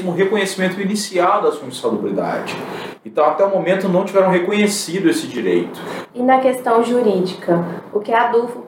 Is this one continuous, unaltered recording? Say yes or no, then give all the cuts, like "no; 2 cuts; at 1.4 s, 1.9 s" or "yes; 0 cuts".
no; 1 cut; at 6.1 s